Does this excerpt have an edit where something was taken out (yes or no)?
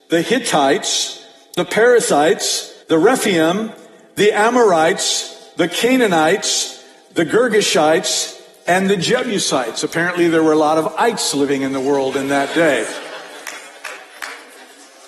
yes